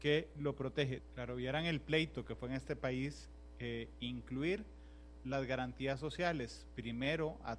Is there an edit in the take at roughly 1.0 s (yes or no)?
yes